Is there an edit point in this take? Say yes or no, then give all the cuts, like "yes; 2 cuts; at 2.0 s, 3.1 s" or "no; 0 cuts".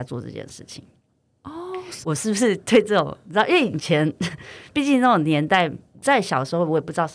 yes; 1 cut; at 2.0 s